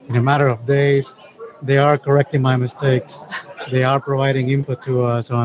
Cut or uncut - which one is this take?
uncut